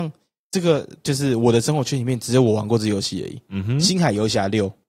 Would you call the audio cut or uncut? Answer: uncut